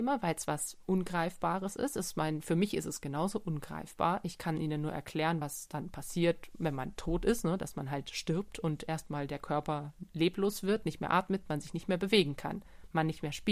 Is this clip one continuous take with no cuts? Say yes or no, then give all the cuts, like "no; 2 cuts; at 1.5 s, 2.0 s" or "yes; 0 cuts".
yes; 0 cuts